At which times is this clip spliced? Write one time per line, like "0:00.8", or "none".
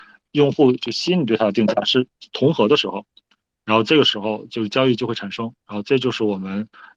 none